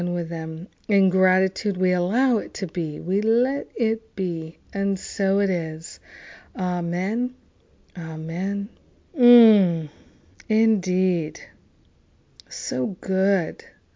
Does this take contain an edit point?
yes; 1 cut; at 9.1 s

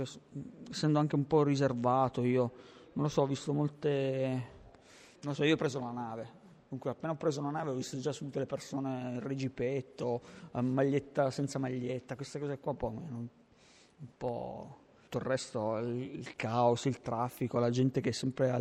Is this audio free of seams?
no; 1 cut; at 14.9 s

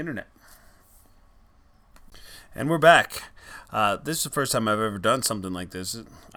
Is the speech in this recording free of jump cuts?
yes; 0 cuts

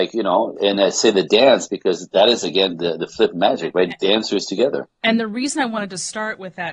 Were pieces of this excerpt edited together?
no; 0 cuts

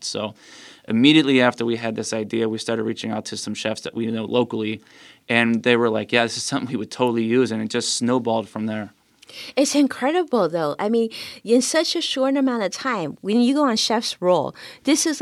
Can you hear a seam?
no; 0 cuts

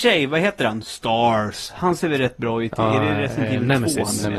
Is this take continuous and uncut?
yes; 0 cuts

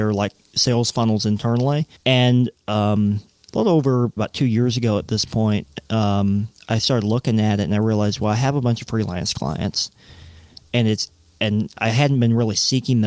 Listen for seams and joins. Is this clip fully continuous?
no; 2 cuts; at 2.0 s, 4.2 s

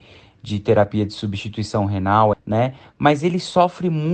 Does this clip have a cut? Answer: yes; 1 cut; at 2.3 s

